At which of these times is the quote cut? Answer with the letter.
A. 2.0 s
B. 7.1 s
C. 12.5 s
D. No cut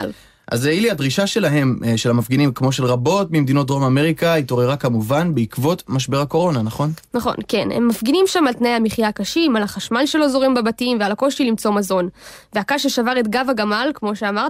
D